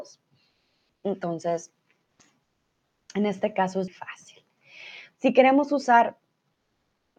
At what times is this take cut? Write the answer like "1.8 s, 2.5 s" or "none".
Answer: 3.9 s, 5.1 s